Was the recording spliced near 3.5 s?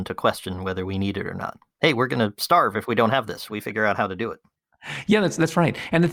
yes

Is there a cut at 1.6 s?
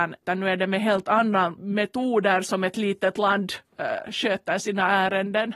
yes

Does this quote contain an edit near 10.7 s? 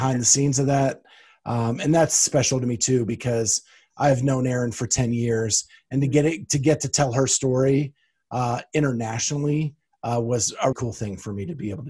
yes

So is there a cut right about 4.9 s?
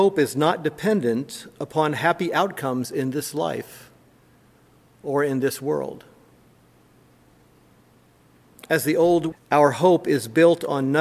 no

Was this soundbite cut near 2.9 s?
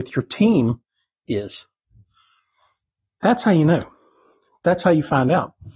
no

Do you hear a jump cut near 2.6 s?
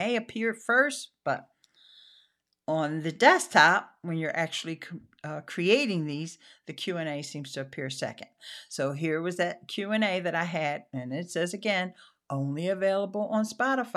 no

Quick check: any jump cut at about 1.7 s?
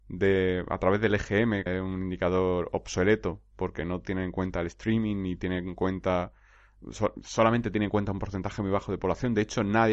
yes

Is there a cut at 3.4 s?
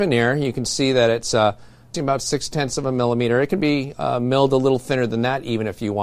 no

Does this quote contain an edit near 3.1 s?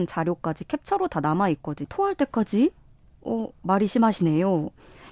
no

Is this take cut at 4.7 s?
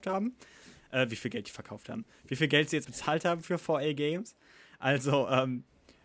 no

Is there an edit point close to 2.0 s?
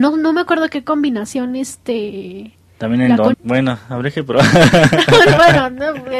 no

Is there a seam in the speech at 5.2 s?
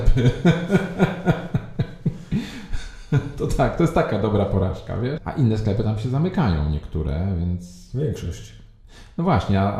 yes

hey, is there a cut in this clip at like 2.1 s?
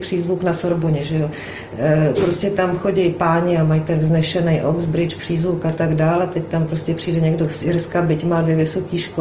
no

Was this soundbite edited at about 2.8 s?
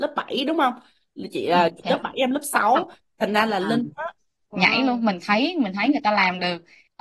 no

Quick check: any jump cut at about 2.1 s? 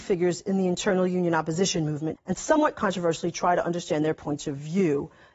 yes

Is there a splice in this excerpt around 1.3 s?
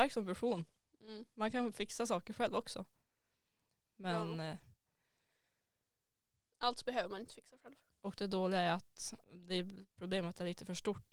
no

